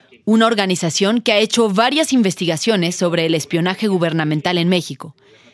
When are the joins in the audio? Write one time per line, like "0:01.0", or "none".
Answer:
none